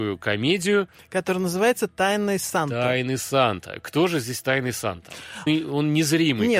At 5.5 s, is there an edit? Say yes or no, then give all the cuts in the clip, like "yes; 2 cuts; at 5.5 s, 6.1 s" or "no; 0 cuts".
yes; 1 cut; at 5.5 s